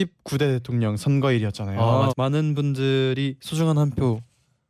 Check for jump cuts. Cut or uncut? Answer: cut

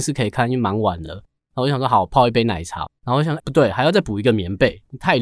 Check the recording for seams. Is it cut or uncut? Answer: uncut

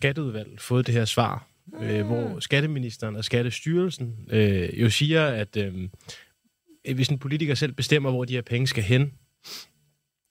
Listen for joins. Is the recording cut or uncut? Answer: uncut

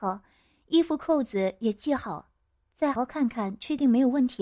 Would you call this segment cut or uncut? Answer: cut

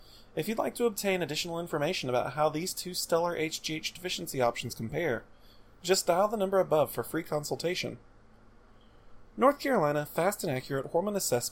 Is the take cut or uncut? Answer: uncut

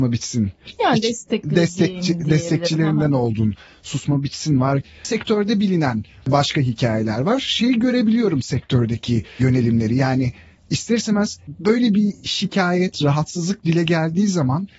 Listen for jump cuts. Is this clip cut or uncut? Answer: uncut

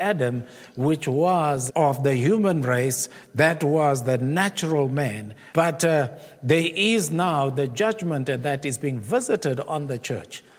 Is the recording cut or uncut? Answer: cut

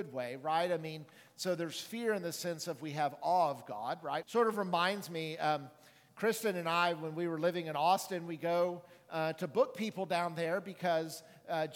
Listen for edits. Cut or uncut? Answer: cut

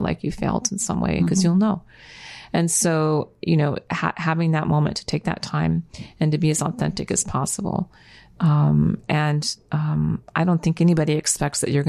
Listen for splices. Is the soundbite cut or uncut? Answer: uncut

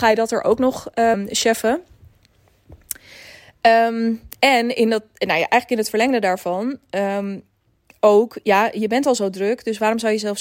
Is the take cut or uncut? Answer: cut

